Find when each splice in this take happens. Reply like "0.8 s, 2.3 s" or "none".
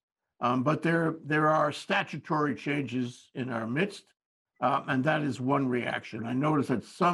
6.2 s